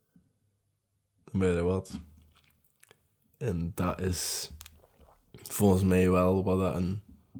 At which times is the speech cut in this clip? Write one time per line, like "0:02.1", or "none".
none